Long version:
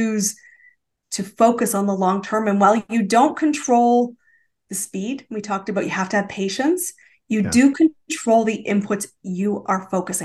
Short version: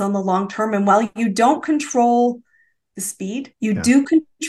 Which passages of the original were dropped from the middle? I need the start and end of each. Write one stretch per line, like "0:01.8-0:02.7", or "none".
0:05.3-0:07.2